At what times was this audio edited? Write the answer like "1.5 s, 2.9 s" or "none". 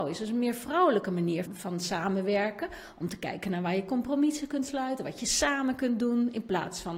1.4 s